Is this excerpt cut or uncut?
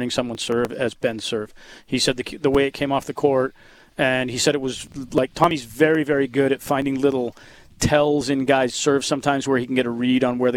uncut